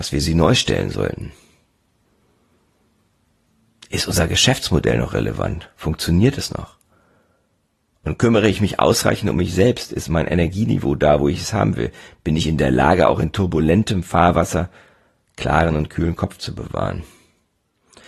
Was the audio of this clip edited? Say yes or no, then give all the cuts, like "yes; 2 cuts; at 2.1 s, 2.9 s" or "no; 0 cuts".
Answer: no; 0 cuts